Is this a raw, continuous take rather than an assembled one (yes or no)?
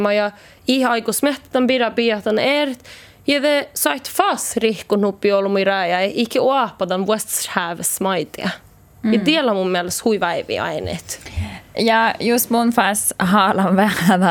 yes